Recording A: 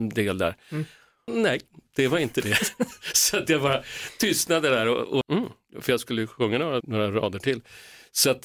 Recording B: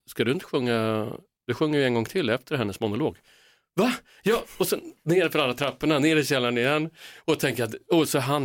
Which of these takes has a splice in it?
A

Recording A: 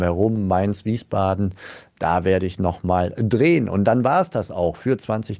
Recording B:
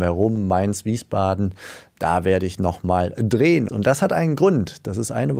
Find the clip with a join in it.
B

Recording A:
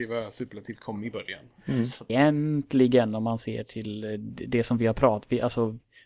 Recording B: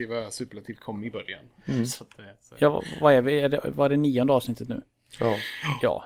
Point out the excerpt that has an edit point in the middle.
A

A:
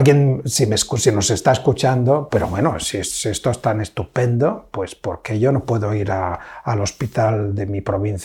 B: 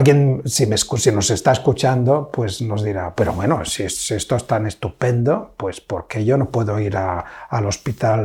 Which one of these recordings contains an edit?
A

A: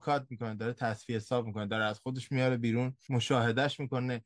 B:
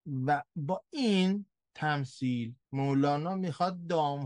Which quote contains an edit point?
B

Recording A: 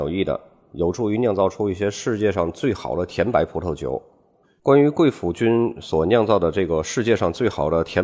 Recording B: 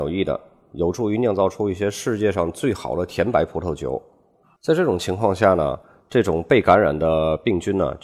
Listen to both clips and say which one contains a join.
A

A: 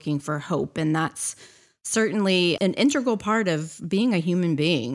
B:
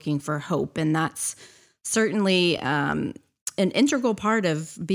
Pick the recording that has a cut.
A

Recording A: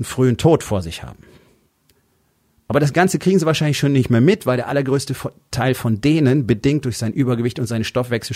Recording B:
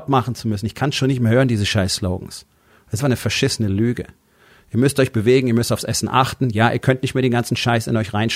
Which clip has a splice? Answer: B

